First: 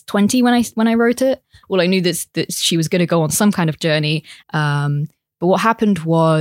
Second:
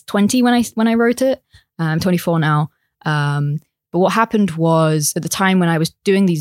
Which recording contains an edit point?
first; 2 cuts; at 1.6 s, 4.4 s

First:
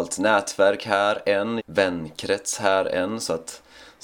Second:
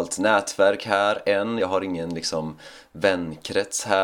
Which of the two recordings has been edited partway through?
first; 1 cut; at 1.6 s

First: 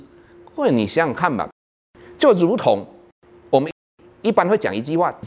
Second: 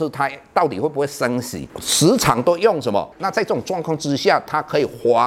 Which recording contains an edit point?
second; 1 cut; at 3.1 s

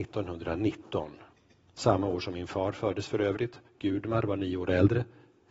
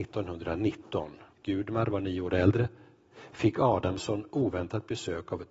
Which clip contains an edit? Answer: second; 1 cut; at 1.4 s

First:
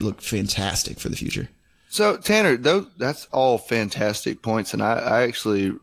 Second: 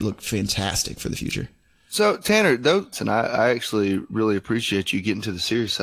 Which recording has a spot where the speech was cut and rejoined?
second; 1 cut; at 2.9 s

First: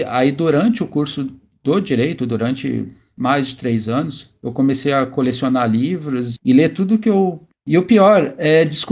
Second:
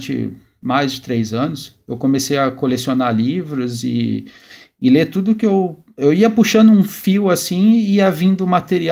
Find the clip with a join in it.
first; 2 cuts; at 6.4 s, 7.5 s

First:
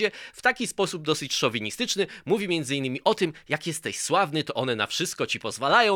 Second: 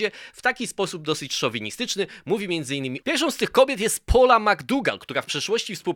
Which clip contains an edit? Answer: second; 1 cut; at 3.0 s

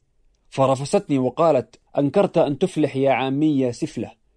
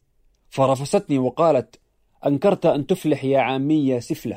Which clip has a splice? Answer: first; 1 cut; at 1.9 s

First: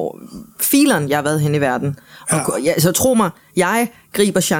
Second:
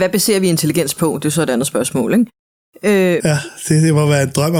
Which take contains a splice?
second; 1 cut; at 3.2 s

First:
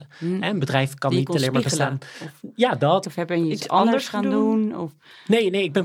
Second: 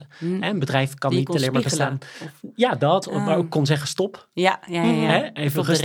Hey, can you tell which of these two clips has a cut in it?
first; 1 cut; at 3.0 s

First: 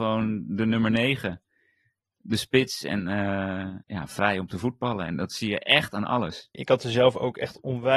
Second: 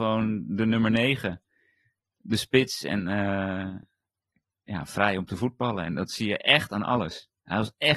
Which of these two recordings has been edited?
first; 2 cuts; at 3.8 s, 6.5 s

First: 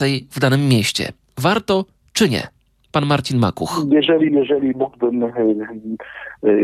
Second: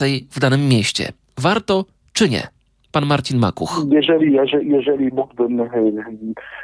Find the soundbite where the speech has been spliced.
first; 1 cut; at 4.3 s

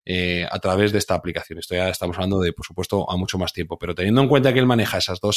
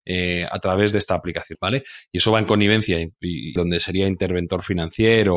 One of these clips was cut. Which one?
second; 2 cuts; at 1.5 s, 3.6 s

